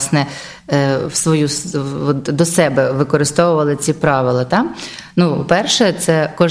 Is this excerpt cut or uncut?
uncut